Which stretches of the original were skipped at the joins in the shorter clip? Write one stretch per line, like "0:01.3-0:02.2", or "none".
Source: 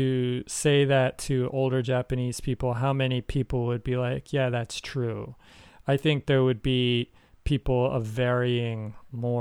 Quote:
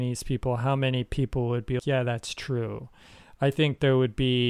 0:04.0-0:04.3